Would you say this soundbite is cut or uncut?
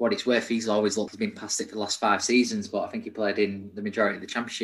cut